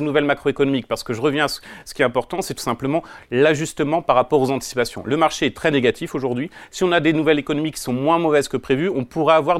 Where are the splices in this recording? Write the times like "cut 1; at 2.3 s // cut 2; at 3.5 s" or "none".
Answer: none

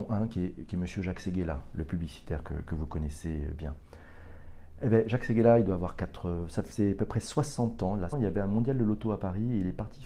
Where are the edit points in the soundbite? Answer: cut 1; at 8.1 s

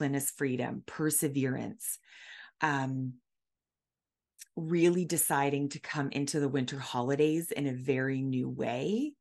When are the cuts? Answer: none

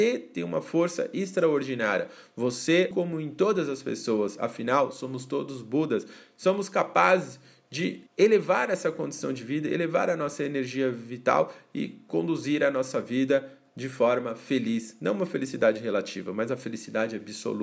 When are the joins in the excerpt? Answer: cut 1; at 2.9 s // cut 2; at 8.1 s

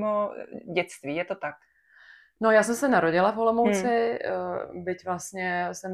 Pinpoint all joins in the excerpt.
none

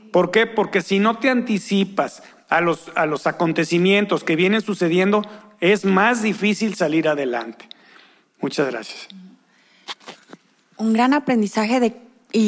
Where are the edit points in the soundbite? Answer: none

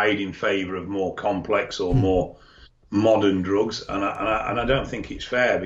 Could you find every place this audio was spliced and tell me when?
none

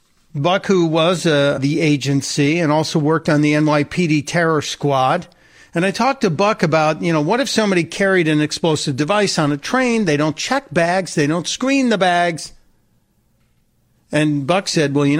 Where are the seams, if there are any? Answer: cut 1; at 1.6 s

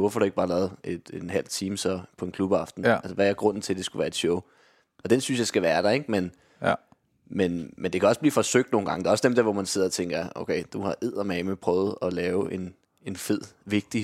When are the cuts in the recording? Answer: none

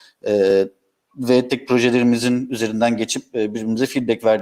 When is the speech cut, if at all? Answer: cut 1; at 1.5 s

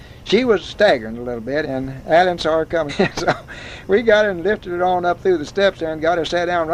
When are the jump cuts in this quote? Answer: cut 1; at 1.6 s // cut 2; at 2.9 s

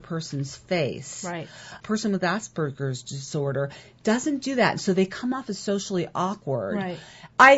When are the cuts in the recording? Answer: none

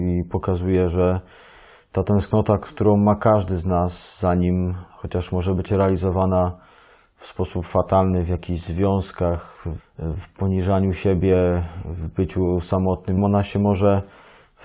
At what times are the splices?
cut 1; at 9.8 s // cut 2; at 13.2 s

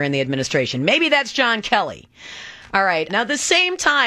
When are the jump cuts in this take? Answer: cut 1; at 3.1 s

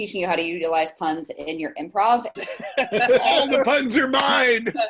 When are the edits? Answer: cut 1; at 2.3 s

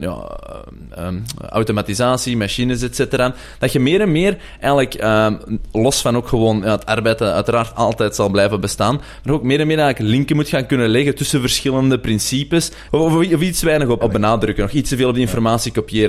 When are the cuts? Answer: cut 1; at 12.9 s // cut 2; at 14.0 s

